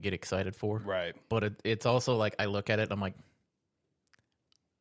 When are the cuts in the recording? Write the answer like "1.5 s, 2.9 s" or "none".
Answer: none